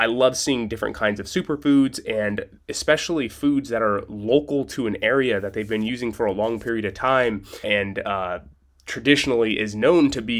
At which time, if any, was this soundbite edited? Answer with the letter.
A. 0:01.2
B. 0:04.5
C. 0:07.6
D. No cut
C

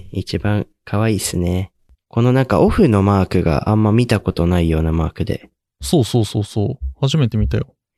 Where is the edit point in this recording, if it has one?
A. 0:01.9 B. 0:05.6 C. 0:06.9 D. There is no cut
A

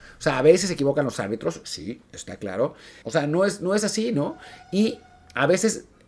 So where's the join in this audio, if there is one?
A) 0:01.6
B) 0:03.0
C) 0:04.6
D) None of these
B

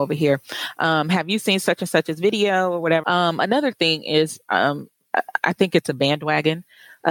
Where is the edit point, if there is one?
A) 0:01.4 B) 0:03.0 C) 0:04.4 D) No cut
B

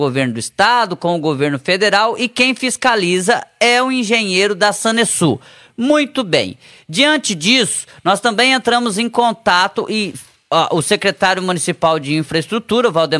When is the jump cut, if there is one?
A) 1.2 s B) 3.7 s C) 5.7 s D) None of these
D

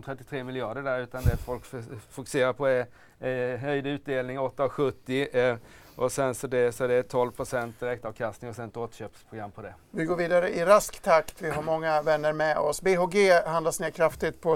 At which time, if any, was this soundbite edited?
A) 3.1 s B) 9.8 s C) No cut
C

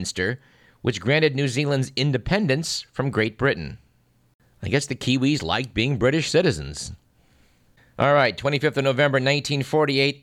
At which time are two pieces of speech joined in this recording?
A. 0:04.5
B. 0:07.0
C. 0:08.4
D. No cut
D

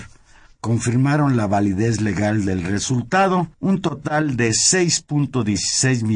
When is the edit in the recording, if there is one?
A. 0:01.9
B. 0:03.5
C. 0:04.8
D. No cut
B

